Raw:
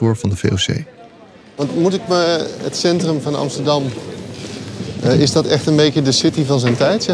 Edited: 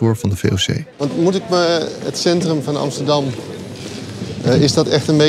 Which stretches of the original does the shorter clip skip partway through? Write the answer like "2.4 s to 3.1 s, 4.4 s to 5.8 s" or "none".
0.9 s to 1.5 s